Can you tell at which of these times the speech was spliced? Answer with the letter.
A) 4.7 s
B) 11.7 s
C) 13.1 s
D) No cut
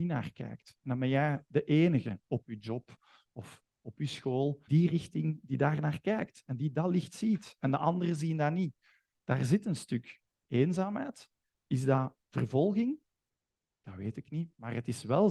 A